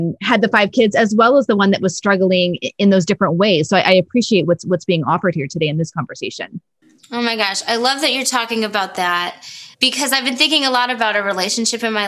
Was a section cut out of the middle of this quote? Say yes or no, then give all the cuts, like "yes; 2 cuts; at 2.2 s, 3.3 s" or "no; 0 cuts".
yes; 1 cut; at 9.7 s